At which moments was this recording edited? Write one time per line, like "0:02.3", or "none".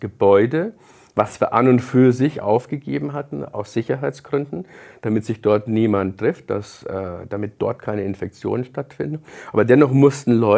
none